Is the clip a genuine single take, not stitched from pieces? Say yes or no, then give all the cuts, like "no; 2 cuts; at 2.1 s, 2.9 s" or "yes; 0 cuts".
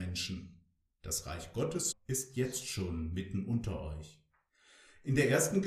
no; 1 cut; at 1.9 s